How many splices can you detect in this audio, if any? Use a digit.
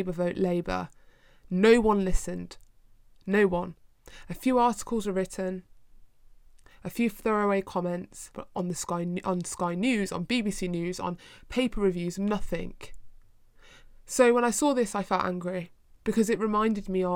1